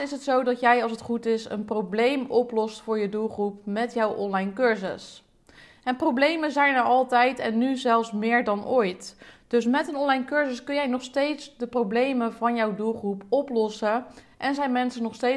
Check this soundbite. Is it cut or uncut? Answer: uncut